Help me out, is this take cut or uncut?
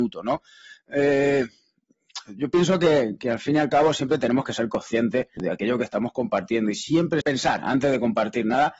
cut